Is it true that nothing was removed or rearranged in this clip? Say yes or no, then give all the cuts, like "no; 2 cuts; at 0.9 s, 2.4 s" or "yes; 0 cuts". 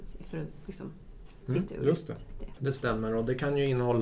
no; 1 cut; at 1.7 s